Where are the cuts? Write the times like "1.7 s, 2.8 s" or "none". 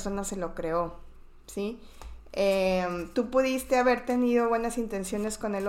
none